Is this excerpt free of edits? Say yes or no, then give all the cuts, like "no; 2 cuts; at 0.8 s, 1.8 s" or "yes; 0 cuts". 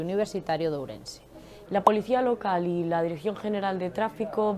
no; 1 cut; at 1.7 s